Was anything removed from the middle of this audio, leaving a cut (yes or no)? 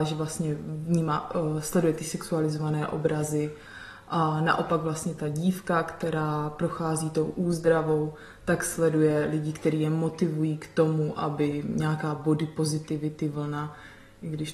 no